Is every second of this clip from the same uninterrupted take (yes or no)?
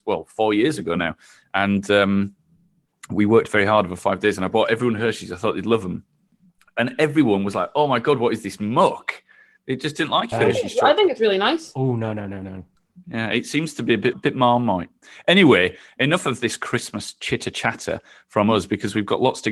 no